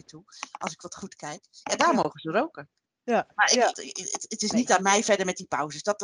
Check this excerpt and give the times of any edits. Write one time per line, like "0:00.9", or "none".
0:03.7